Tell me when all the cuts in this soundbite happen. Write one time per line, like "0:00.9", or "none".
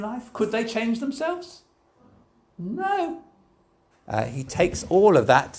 0:03.9